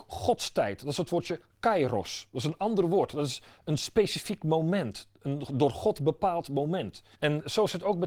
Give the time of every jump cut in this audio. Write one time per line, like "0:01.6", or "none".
0:07.2